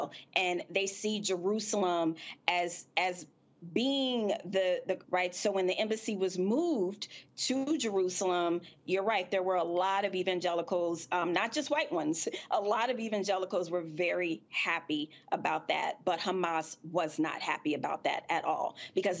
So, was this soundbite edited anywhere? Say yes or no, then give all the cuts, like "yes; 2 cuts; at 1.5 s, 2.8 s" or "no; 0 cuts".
yes; 1 cut; at 5.0 s